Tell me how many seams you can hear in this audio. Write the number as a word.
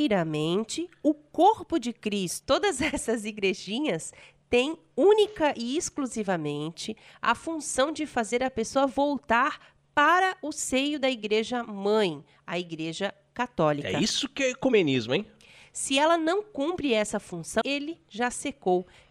two